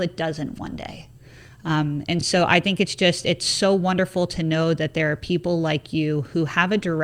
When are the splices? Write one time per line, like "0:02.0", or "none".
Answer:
none